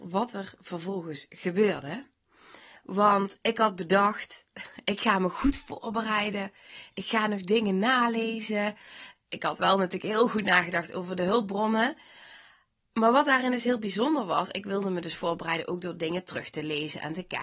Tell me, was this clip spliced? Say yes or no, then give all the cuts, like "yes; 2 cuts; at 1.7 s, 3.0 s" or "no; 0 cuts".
no; 0 cuts